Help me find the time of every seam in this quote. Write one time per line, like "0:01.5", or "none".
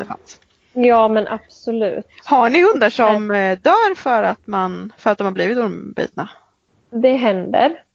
none